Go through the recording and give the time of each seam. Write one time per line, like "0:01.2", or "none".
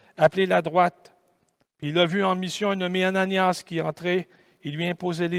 0:01.6